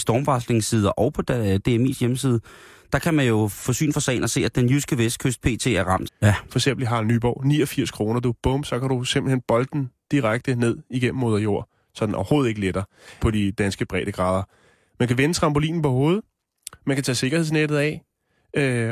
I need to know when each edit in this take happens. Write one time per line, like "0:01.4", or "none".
0:06.1
0:13.2